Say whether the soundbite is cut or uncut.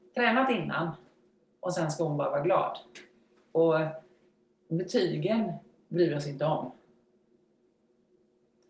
cut